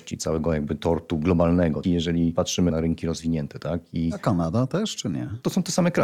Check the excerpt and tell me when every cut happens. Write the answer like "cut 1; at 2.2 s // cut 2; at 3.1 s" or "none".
cut 1; at 1.8 s